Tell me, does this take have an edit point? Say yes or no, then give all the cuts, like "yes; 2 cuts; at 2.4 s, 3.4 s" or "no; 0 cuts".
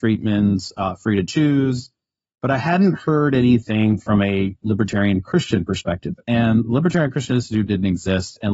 no; 0 cuts